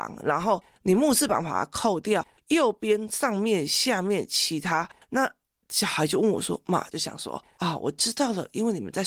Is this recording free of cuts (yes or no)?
no